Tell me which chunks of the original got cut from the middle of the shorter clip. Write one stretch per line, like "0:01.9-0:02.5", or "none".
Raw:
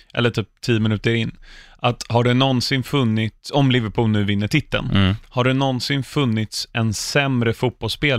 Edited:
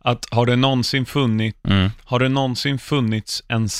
0:03.4-0:04.9

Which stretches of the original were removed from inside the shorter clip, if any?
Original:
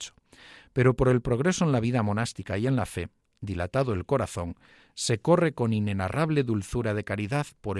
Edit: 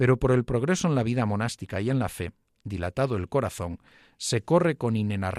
none

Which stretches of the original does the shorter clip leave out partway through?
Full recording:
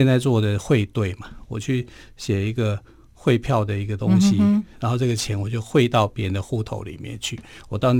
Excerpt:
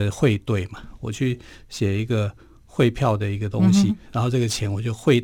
0:04.4-0:04.6

